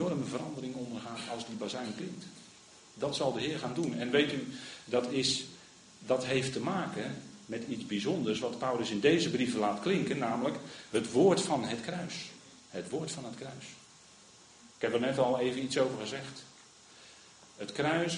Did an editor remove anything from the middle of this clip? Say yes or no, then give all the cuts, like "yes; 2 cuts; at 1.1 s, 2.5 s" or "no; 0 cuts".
no; 0 cuts